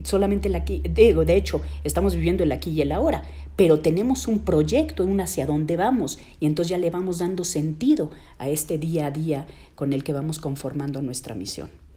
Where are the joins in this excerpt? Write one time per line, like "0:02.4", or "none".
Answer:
none